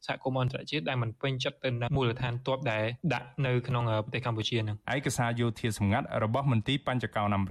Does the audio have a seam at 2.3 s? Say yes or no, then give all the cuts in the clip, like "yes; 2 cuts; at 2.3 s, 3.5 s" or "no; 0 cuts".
no; 1 cut; at 4.8 s